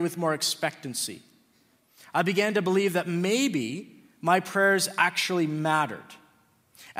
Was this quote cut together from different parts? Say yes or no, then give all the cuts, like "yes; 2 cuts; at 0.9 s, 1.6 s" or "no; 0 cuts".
no; 0 cuts